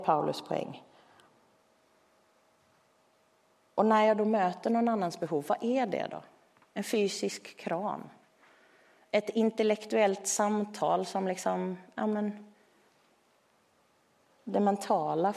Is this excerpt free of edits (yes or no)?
yes